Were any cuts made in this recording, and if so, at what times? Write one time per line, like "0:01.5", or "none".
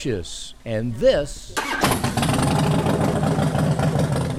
none